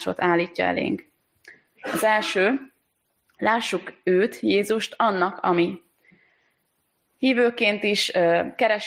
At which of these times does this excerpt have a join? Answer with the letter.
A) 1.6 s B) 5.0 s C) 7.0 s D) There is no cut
D